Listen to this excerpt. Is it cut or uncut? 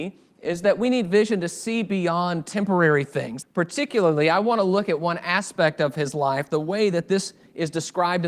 cut